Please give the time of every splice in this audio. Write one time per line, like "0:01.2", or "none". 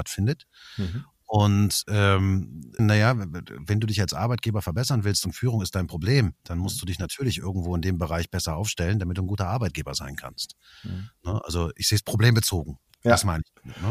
0:02.8
0:06.4